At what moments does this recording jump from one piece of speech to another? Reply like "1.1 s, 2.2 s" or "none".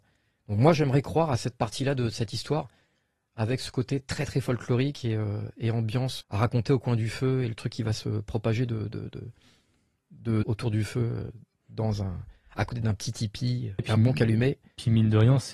6.2 s, 10.4 s, 13.8 s